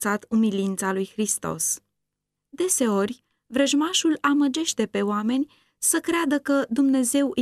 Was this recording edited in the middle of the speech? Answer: yes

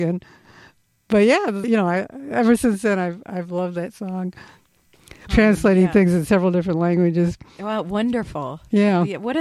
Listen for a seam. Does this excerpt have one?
yes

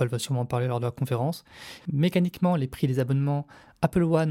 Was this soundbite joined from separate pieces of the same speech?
yes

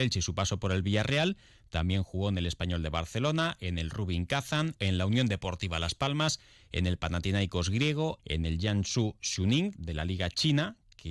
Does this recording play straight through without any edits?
no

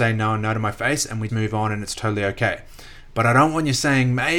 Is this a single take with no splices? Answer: no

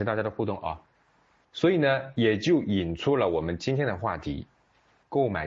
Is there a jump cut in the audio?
no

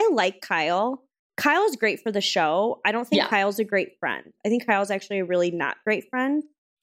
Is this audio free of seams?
yes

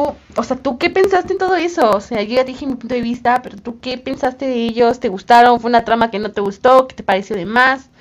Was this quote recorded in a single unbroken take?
yes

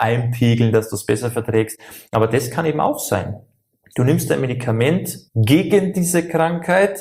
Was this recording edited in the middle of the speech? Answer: yes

